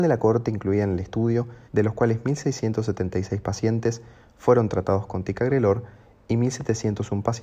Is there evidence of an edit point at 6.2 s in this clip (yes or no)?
no